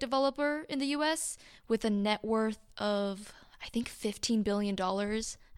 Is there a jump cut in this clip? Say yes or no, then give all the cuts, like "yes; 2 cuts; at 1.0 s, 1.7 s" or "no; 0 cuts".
no; 0 cuts